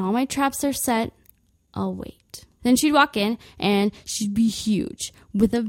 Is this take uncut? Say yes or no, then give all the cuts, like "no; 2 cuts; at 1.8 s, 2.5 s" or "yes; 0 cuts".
no; 1 cut; at 2.6 s